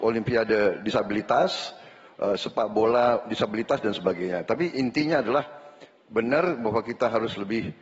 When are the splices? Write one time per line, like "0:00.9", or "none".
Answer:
none